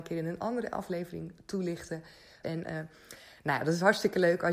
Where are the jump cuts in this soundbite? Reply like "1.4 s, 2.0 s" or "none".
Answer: 2.4 s